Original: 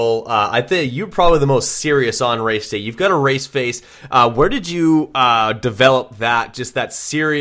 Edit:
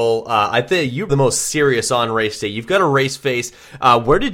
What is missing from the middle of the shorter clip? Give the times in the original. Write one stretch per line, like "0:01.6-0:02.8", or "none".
0:01.1-0:01.4